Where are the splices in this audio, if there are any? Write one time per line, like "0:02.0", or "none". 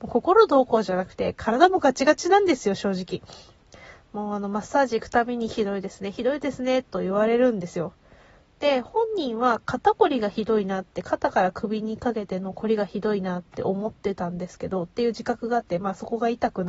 none